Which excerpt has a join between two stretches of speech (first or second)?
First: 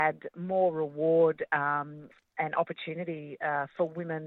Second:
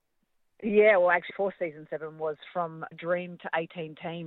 second